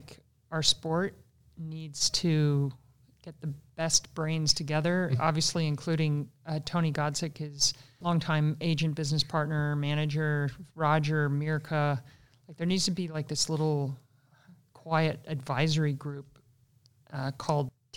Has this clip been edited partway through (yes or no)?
no